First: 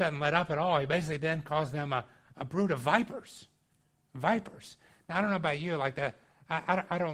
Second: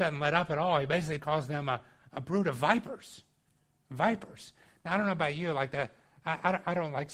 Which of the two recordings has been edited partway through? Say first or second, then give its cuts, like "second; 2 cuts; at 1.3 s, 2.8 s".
second; 1 cut; at 1.2 s